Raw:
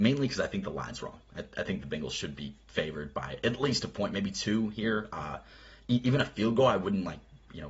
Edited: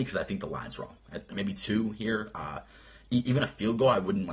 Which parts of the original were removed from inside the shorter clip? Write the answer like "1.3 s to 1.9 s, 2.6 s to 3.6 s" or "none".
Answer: 1.5 s to 4.1 s